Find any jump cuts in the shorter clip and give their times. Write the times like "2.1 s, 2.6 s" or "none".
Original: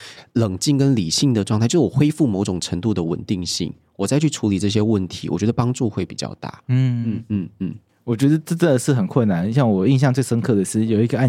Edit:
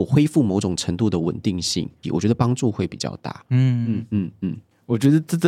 2.0 s